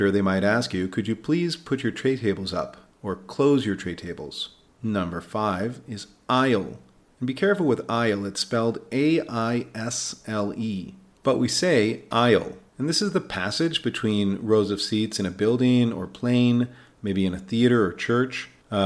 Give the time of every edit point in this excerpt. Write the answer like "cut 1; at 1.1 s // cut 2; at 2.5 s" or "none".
none